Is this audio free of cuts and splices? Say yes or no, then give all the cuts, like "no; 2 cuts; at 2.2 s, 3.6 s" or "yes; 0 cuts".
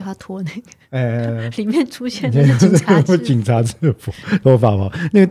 yes; 0 cuts